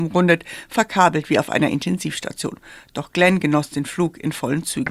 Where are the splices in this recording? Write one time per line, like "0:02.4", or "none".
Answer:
none